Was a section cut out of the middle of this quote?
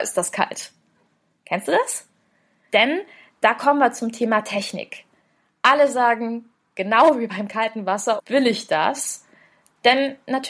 yes; 2 cuts; at 2.7 s, 8.2 s

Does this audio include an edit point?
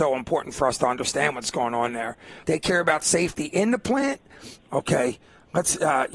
yes; 2 cuts; at 2.4 s, 4.6 s

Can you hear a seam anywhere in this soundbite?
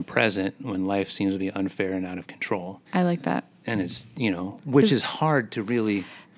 yes; 1 cut; at 2.9 s

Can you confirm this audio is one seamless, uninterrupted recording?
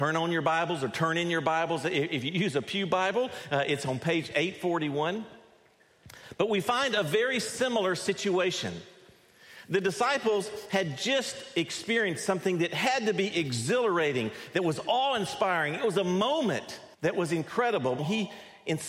no; 2 cuts; at 16.9 s, 18.0 s

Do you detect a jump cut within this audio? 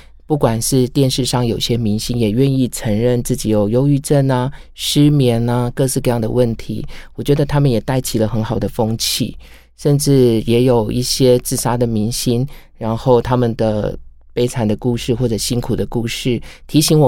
no; 0 cuts

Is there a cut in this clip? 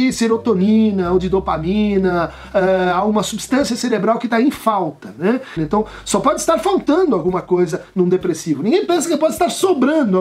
yes; 1 cut; at 5.6 s

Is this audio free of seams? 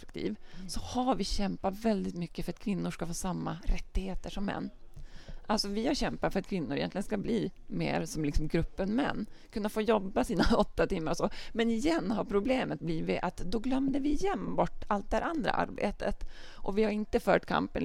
yes; 0 cuts

